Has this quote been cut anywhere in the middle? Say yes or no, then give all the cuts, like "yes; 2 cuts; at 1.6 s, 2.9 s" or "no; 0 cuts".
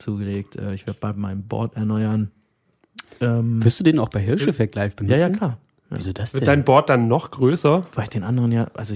no; 0 cuts